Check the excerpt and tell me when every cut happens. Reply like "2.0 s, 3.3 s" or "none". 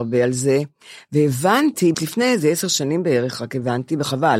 1.9 s